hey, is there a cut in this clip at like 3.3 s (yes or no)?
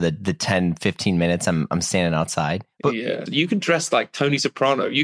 yes